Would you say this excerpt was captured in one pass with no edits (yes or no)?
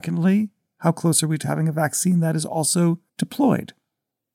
no